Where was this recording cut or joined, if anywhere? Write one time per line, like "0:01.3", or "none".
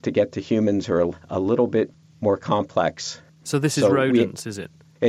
none